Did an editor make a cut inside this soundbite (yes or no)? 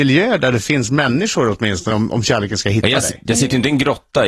no